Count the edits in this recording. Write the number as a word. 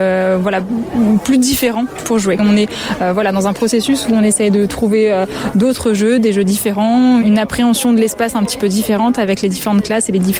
one